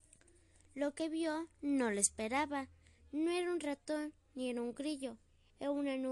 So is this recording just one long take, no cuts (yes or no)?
yes